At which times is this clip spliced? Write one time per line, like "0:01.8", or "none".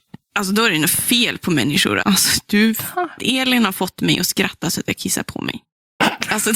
0:02.0
0:03.2